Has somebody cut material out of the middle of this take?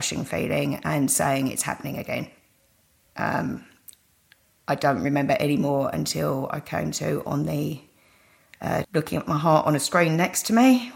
yes; 1 cut; at 8.8 s

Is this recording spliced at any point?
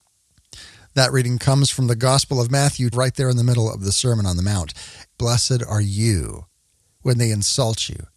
yes; 2 cuts; at 2.9 s, 5.1 s

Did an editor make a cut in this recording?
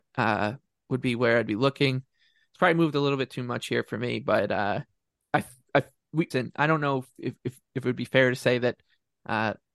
yes; 1 cut; at 6.3 s

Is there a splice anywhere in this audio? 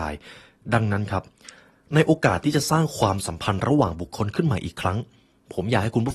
no; 0 cuts

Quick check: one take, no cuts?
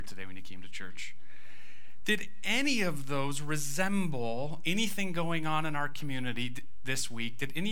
yes; 0 cuts

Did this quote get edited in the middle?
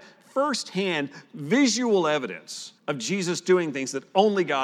yes; 1 cut; at 2.8 s

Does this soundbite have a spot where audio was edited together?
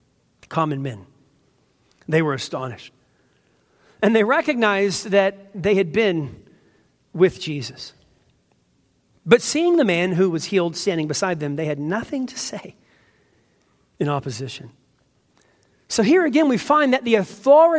no; 0 cuts

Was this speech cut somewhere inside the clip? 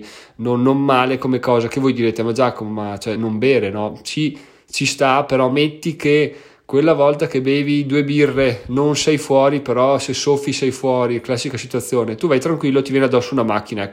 no; 0 cuts

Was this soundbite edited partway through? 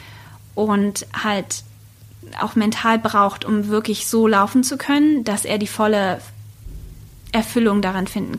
no; 0 cuts

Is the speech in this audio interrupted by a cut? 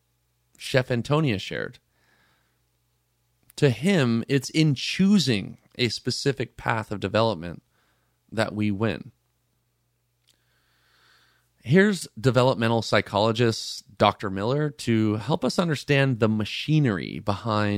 no; 0 cuts

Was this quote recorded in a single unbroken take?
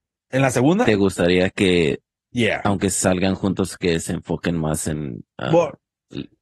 yes; 0 cuts

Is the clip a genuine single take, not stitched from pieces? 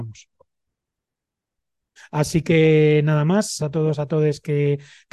no; 2 cuts; at 2.0 s, 3.6 s

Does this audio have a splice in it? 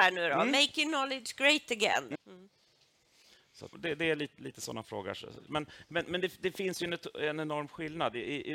yes; 3 cuts; at 2.1 s, 3.7 s, 5.5 s

